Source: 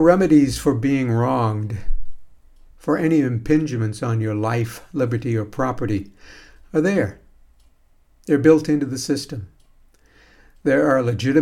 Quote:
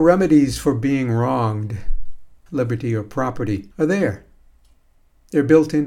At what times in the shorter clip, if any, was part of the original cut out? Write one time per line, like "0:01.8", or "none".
0:02.5
0:03.7